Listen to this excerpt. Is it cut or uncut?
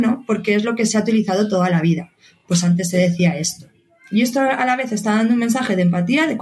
uncut